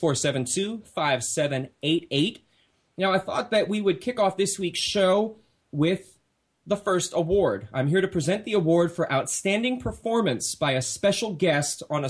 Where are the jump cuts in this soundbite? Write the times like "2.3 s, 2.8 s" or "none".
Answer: none